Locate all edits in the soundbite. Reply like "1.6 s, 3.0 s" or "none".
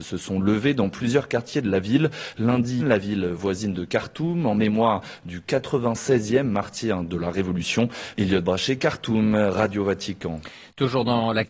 2.8 s, 8.2 s